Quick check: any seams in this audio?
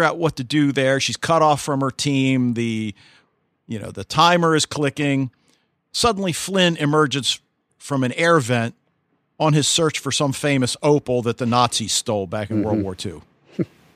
no; 0 cuts

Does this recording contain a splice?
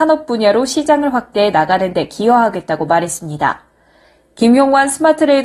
no; 0 cuts

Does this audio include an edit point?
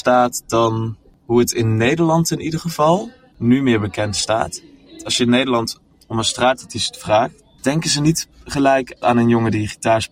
yes; 2 cuts; at 3.3 s, 7.6 s

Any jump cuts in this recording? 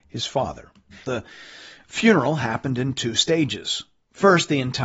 yes; 1 cut; at 1.0 s

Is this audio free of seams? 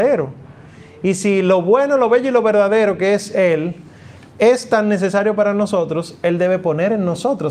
yes; 0 cuts

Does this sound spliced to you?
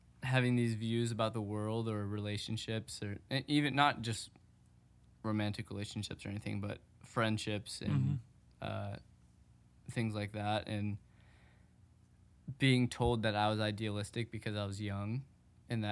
no; 0 cuts

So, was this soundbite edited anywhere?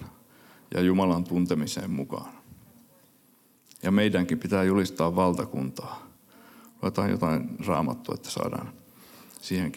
yes; 1 cut; at 3.6 s

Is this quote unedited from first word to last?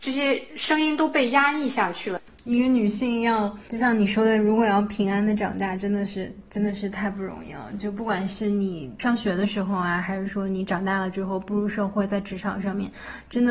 yes; 0 cuts

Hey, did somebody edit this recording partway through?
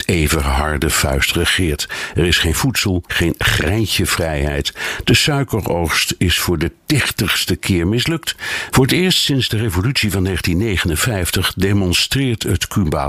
yes; 2 cuts; at 3.1 s, 8.7 s

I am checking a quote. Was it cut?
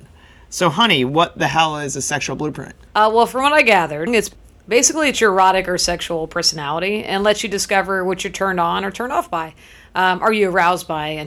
yes; 1 cut; at 4.1 s

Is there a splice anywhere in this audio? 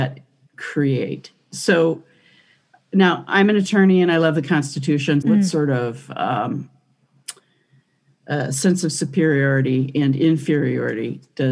yes; 1 cut; at 5.2 s

